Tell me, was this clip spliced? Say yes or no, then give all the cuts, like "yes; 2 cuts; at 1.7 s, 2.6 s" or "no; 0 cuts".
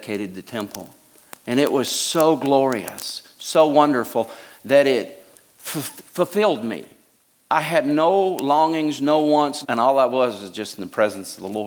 yes; 1 cut; at 9.6 s